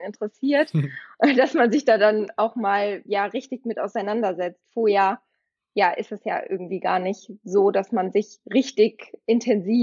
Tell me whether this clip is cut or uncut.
uncut